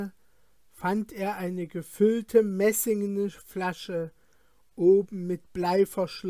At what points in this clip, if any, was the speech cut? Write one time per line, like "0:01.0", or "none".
none